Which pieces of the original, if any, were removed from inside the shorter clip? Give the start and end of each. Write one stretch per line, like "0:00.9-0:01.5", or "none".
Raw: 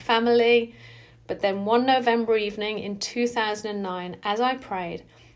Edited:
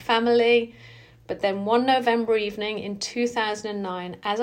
none